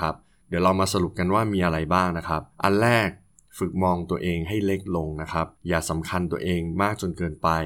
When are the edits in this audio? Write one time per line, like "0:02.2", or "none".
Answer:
0:02.5
0:05.6